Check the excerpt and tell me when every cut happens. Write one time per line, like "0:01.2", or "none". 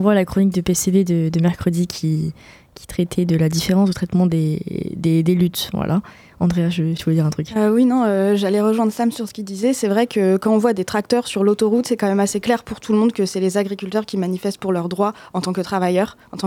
0:07.0